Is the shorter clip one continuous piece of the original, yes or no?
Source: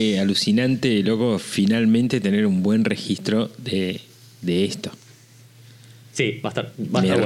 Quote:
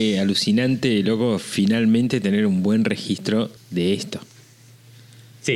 no